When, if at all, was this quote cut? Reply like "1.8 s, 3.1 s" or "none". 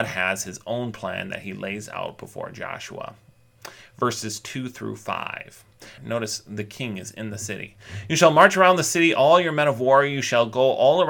6.0 s